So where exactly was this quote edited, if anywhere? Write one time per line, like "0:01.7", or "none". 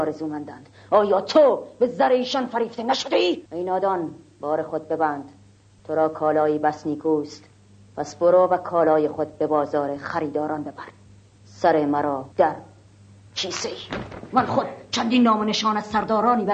0:03.5
0:12.3